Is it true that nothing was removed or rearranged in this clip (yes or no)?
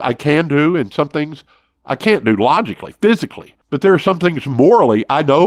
yes